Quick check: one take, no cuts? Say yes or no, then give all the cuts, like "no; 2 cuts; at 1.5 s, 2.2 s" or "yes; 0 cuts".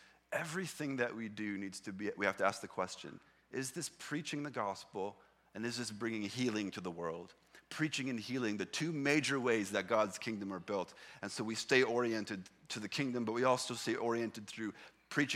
yes; 0 cuts